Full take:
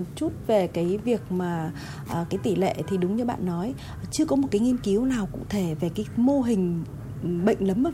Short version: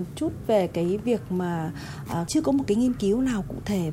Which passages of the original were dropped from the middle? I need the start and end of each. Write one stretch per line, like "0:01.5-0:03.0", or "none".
0:02.3-0:04.1